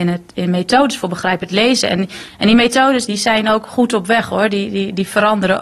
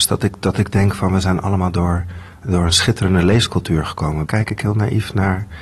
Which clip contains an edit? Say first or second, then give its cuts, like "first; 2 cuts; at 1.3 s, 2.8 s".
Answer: second; 1 cut; at 4.3 s